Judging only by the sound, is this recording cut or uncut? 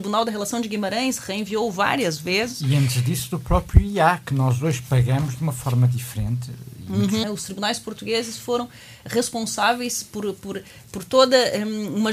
cut